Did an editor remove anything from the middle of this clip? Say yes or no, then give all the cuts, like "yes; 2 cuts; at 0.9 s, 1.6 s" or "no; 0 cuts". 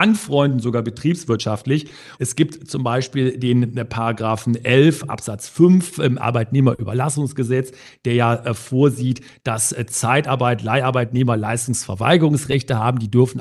yes; 1 cut; at 2.1 s